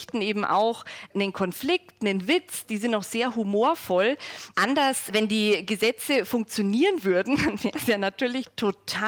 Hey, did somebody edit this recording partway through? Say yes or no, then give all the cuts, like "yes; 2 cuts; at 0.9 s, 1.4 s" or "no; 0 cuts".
no; 0 cuts